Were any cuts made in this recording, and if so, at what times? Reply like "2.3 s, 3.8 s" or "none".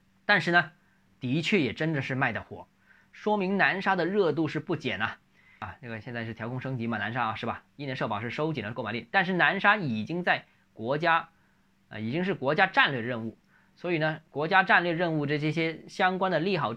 none